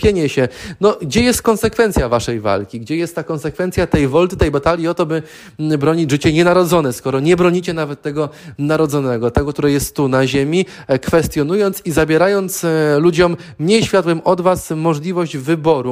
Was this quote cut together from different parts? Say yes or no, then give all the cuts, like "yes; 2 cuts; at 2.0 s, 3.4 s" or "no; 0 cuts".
no; 0 cuts